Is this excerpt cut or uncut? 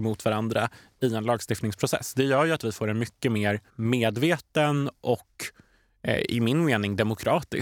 cut